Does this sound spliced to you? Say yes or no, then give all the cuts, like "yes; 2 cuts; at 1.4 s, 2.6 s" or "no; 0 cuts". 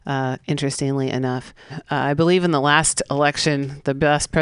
yes; 1 cut; at 1.7 s